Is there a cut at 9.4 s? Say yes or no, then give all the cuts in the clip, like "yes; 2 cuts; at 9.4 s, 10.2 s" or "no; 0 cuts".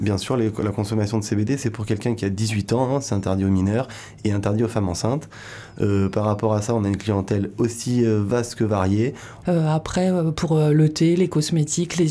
yes; 1 cut; at 9.4 s